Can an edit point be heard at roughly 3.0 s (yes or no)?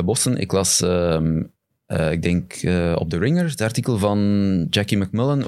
no